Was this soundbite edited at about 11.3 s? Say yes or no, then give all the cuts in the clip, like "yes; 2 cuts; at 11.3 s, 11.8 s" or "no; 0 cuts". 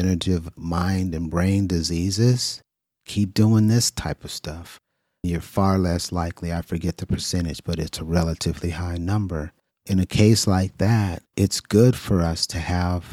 yes; 2 cuts; at 9.7 s, 11.3 s